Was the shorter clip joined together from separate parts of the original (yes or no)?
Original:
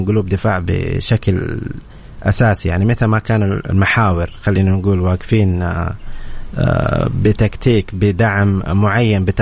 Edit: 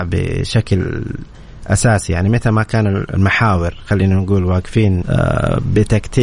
yes